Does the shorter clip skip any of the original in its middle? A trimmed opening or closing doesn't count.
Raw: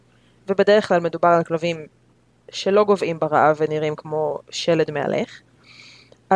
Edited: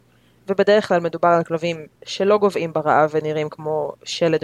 yes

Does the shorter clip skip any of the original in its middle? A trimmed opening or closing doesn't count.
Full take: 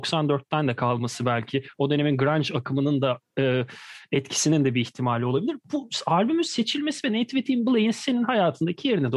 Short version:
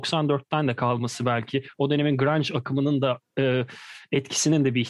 no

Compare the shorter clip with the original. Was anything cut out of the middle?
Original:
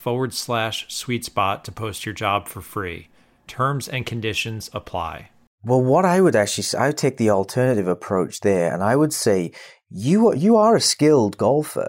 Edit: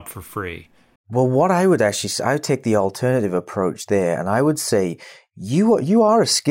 yes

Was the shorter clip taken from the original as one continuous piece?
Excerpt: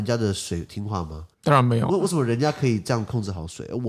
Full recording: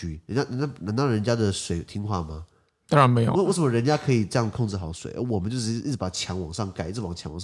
no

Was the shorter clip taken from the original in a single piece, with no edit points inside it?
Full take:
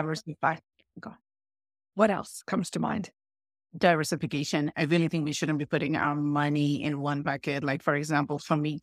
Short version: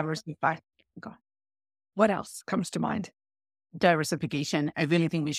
yes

